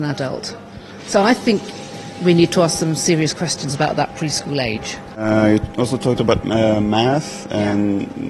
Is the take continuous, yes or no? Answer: yes